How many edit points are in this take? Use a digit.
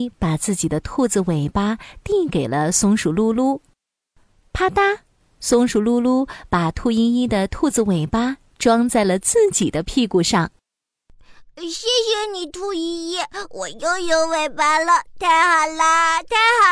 0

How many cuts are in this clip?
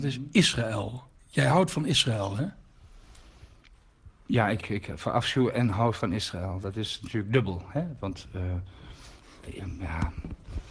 1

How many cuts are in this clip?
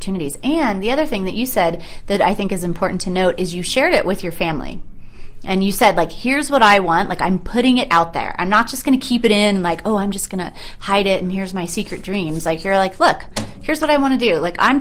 0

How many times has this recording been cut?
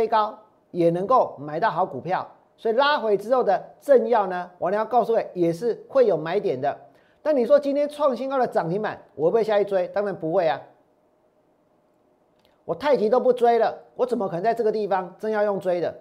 0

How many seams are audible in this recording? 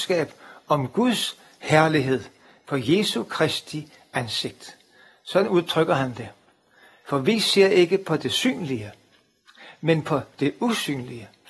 1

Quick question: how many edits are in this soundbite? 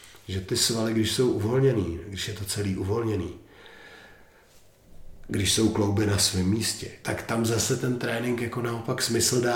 1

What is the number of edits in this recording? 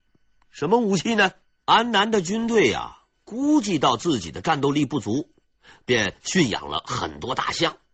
1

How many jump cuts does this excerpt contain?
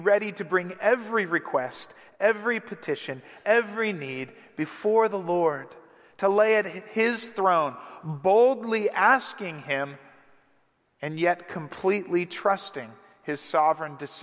1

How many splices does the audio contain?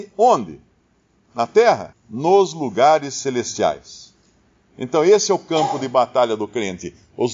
1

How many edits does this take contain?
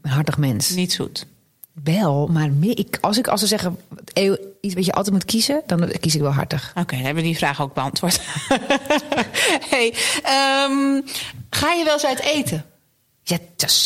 0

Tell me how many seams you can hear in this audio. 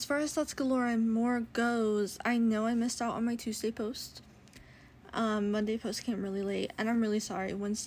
0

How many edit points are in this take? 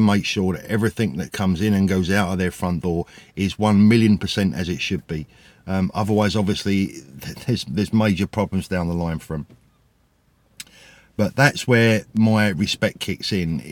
0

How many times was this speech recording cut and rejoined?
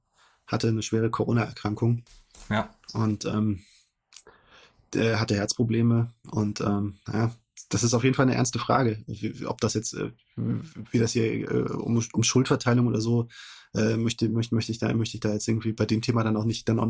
0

